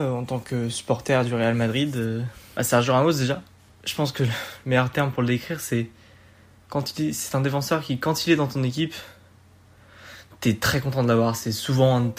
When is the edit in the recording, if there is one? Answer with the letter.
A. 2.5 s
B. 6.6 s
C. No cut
A